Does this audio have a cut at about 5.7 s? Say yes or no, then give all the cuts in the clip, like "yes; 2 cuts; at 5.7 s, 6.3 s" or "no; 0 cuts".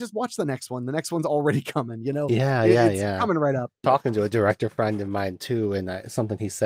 no; 1 cut; at 3.8 s